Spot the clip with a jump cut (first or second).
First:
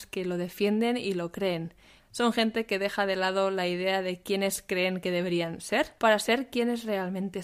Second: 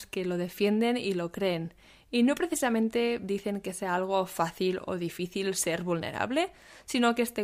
first